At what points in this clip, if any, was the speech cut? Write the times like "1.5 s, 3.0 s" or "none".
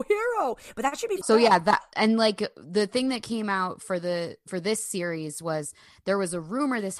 1.2 s